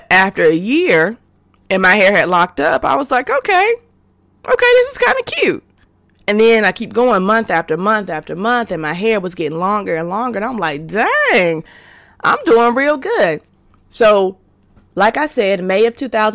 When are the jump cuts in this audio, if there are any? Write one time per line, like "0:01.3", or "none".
none